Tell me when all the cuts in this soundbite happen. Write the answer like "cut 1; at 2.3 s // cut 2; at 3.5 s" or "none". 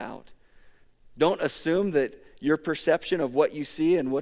none